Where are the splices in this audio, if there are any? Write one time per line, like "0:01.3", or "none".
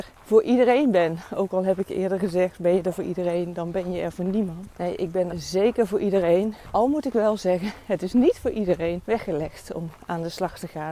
0:05.3